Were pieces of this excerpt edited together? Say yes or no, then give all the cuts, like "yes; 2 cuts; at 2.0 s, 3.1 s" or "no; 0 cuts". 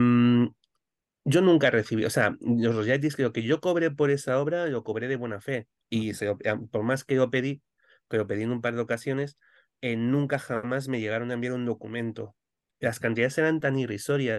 yes; 1 cut; at 5.8 s